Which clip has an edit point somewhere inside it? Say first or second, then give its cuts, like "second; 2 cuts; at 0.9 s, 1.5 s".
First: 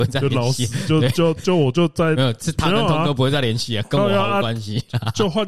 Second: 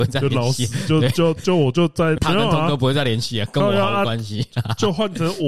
second; 1 cut; at 2.2 s